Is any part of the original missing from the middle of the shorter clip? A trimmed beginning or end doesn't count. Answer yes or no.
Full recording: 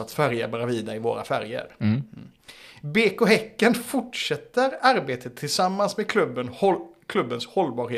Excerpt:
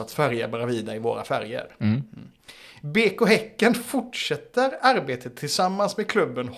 no